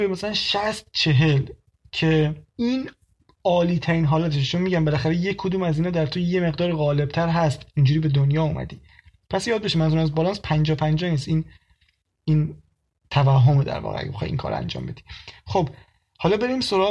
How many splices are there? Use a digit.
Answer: 1